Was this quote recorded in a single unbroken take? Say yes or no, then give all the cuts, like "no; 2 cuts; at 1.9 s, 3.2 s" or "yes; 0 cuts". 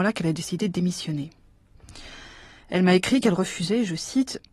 yes; 0 cuts